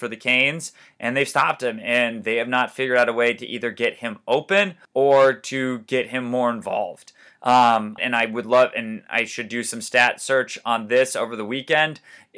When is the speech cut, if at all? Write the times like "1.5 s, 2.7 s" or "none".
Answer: 4.8 s, 8.0 s